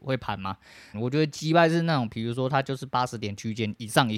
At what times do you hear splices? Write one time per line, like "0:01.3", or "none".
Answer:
0:00.9